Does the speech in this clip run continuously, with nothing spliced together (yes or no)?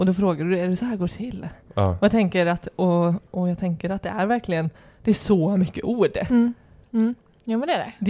no